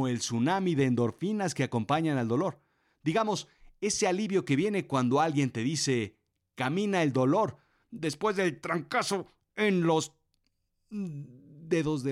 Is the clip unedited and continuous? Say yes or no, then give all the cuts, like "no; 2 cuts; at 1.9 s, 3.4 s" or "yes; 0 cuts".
yes; 0 cuts